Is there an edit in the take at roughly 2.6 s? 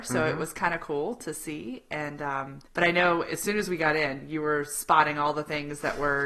yes; 1 cut; at 2.6 s

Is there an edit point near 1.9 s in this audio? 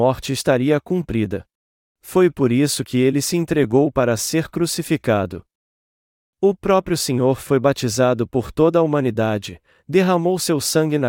yes; 1 cut; at 1.9 s

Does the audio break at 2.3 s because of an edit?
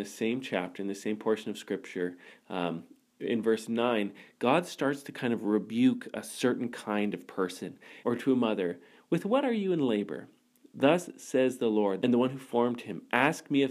no; 2 cuts; at 8.0 s, 12.0 s

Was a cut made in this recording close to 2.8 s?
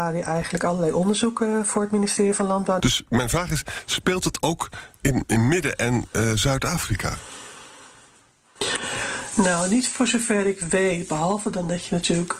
yes; 1 cut; at 2.8 s

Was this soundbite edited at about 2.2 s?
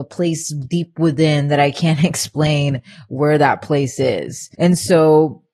no; 1 cut; at 4.5 s

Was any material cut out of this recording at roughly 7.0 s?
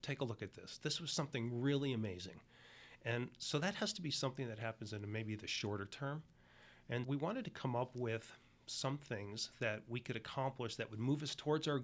yes; 1 cut; at 7.0 s

